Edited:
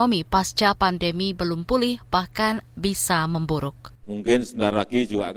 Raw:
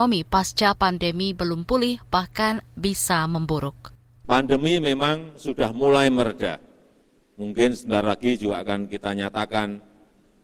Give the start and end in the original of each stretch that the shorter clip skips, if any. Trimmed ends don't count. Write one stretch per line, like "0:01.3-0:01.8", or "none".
0:04.0-0:07.3